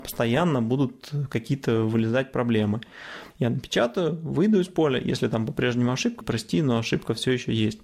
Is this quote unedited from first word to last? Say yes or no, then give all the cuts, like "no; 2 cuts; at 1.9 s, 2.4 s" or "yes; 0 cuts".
no; 2 cuts; at 3.3 s, 6.2 s